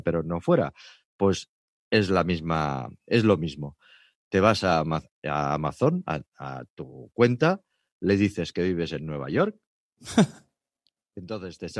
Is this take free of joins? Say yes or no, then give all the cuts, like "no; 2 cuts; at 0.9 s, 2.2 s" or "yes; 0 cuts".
yes; 0 cuts